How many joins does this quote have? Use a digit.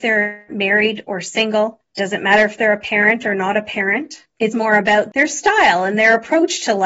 1